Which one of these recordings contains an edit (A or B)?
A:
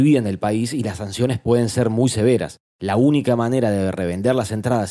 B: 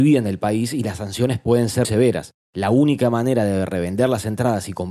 B